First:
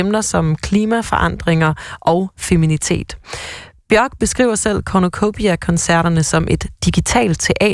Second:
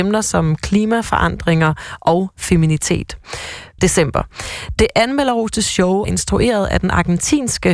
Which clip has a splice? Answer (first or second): second